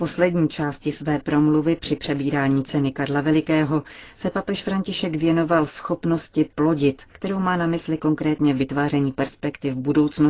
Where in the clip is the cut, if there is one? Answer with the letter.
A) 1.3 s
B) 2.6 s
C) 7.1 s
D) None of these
C